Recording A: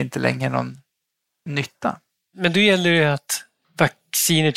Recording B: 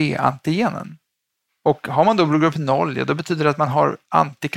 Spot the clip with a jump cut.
B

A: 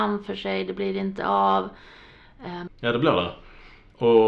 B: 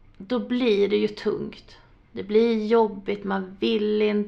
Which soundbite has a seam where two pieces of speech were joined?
A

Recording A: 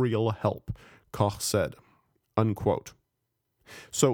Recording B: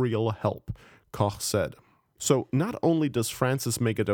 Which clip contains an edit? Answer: B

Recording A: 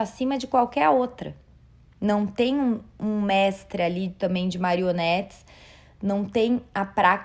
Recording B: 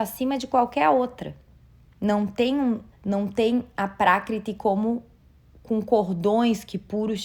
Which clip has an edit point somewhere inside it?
B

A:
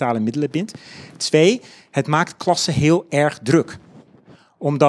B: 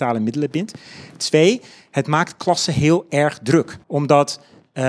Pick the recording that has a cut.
B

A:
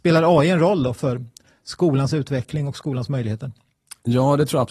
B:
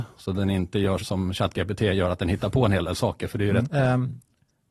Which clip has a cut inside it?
B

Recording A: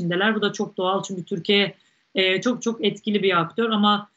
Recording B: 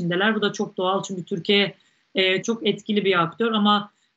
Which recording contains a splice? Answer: B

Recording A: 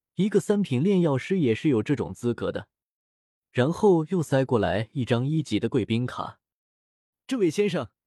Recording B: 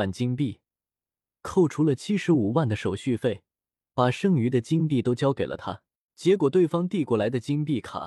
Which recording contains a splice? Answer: B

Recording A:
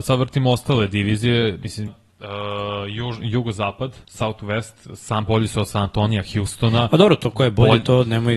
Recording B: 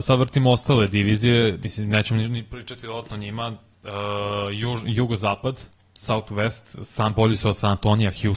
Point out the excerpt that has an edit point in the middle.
A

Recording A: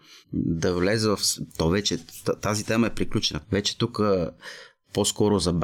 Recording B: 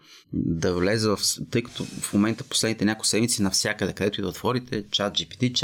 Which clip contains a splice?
A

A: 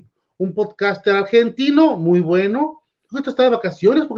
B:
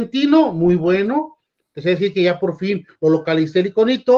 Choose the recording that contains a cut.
A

